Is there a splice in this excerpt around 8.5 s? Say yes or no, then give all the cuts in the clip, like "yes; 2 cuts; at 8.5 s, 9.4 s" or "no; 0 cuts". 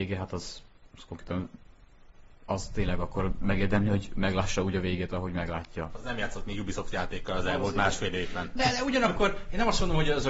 no; 1 cut; at 5.9 s